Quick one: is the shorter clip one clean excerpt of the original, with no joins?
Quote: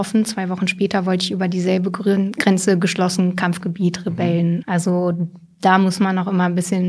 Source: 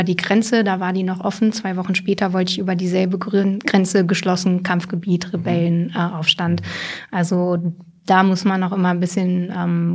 no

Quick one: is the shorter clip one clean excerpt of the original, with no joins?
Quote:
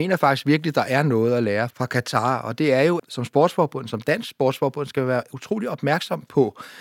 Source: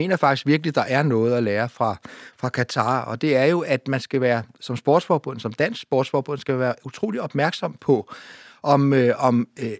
no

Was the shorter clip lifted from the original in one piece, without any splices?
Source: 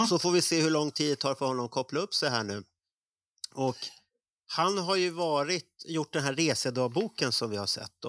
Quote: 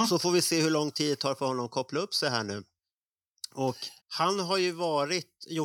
no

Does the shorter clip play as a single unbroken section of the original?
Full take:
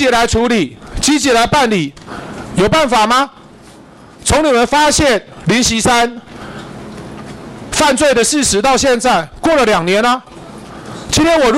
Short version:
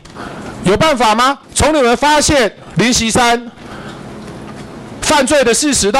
no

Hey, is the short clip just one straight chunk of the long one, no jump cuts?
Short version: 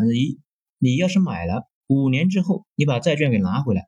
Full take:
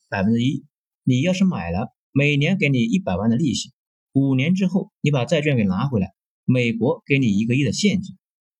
no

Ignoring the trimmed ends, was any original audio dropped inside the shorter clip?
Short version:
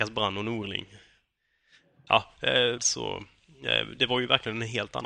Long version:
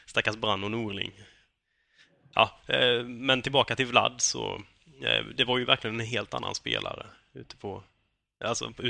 yes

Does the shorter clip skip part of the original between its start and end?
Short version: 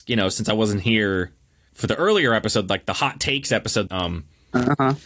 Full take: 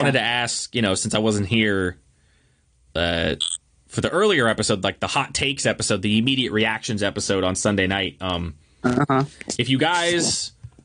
yes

